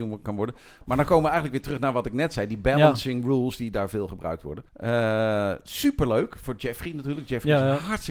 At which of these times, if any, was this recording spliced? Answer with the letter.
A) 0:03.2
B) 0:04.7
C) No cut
B